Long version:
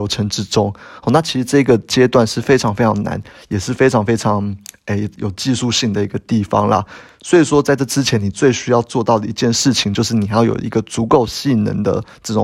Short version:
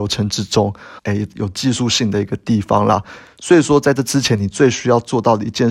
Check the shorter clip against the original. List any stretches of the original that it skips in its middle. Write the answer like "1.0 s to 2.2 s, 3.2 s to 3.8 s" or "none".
1.0 s to 4.8 s

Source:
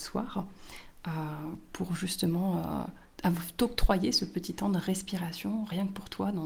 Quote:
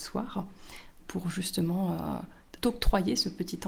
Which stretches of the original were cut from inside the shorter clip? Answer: 1.0 s to 1.6 s, 3.2 s to 3.5 s

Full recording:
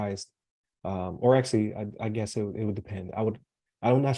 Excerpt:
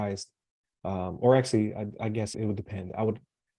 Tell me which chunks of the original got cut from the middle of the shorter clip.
2.3 s to 2.5 s

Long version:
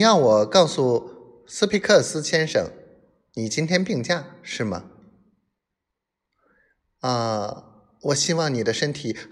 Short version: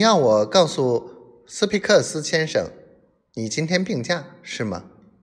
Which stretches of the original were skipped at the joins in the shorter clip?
none

